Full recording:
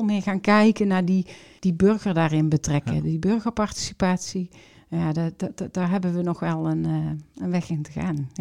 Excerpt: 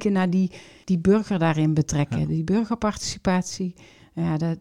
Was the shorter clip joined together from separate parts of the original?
no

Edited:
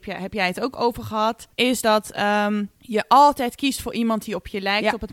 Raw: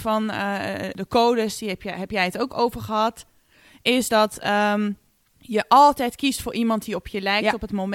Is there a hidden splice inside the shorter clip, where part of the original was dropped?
yes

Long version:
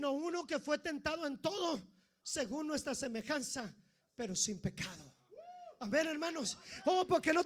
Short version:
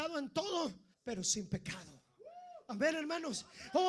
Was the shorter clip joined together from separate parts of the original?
yes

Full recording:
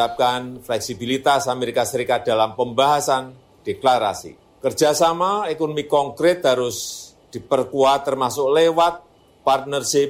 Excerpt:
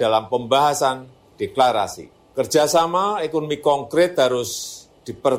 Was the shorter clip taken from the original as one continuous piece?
yes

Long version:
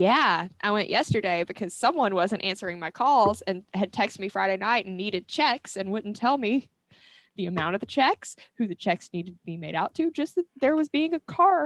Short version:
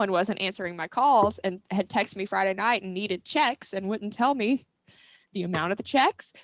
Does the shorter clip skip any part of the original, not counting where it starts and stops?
no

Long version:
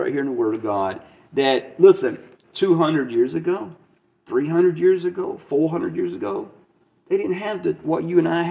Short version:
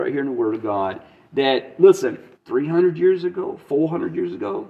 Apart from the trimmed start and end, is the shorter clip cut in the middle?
yes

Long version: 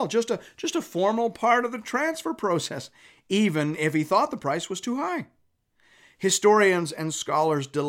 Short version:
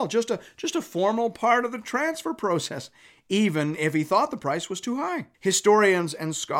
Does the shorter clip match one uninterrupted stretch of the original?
no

